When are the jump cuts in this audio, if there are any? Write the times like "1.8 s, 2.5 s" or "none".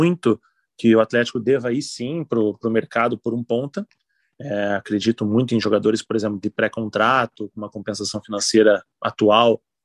none